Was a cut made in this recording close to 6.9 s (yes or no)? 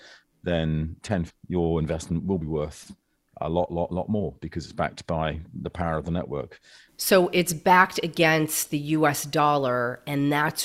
yes